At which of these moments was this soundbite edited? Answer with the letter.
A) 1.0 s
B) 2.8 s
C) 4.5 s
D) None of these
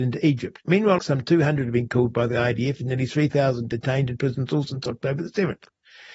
A